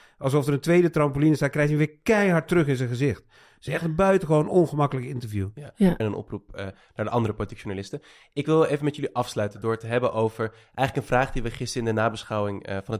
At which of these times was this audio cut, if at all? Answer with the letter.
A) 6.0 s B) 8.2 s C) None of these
A